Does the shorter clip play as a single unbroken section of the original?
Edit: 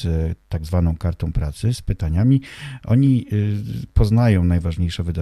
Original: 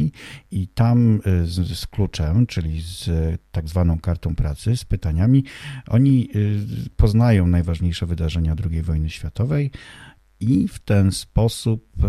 yes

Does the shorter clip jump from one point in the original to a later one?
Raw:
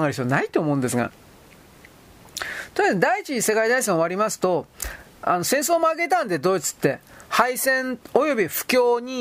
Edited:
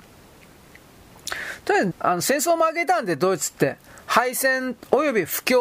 yes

